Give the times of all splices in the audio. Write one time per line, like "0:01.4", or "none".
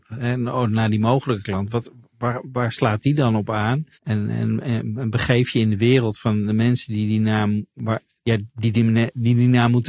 0:03.9

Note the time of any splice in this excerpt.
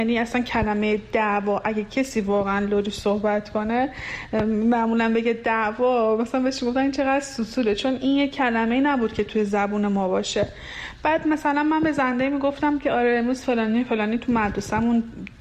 none

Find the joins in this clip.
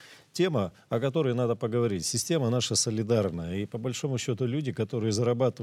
none

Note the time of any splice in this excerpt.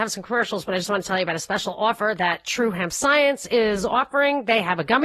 none

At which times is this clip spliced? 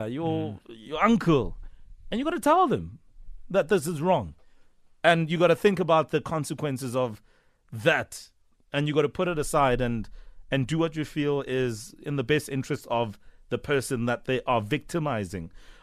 none

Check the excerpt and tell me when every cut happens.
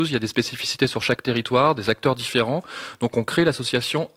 none

